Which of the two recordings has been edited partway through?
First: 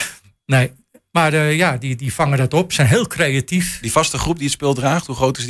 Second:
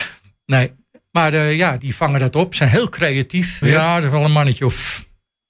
second; 2 cuts; at 1.8 s, 3.6 s

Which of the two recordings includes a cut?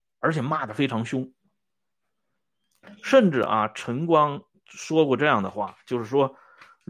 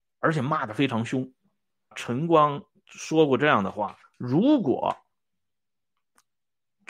second; 2 cuts; at 1.9 s, 4.0 s

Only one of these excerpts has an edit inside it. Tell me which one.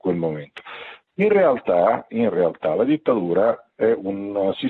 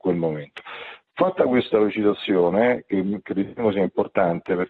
first; 1 cut; at 1.1 s

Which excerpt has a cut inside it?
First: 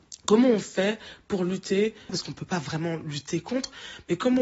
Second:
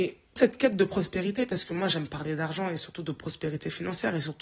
first; 1 cut; at 2.1 s

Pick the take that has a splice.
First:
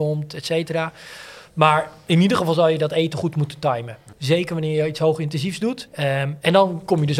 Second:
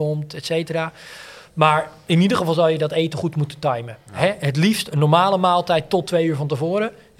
first; 2 cuts; at 4.1 s, 5.9 s

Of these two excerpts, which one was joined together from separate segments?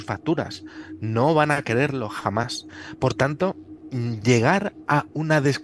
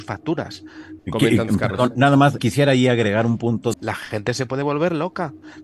second; 3 cuts; at 1.0 s, 2.4 s, 3.7 s

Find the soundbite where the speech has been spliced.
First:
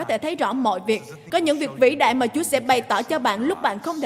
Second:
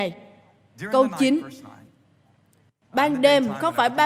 first; 1 cut; at 1.3 s

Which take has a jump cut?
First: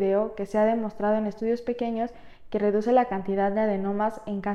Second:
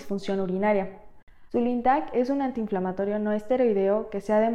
second; 1 cut; at 1.5 s

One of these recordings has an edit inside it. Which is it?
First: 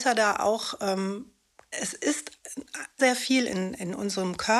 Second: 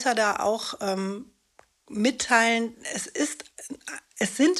first; 2 cuts; at 1.7 s, 3.0 s

